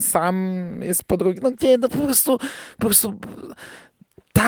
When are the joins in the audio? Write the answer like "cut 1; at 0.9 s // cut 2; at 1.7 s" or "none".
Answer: none